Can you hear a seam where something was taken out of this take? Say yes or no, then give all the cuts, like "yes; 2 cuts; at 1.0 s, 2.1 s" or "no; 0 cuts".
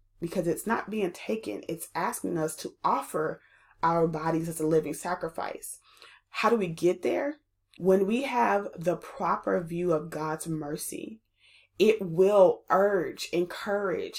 no; 0 cuts